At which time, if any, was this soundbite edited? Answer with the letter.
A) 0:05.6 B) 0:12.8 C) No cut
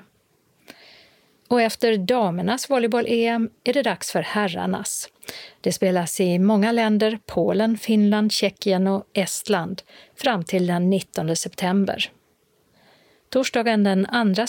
C